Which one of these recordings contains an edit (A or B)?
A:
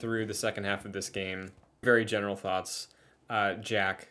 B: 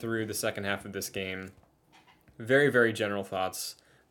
A